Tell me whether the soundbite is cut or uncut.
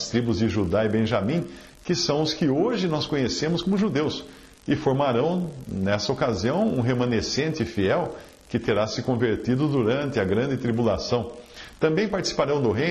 uncut